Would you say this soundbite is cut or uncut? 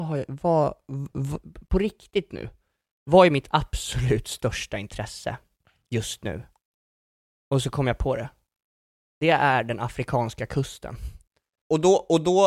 uncut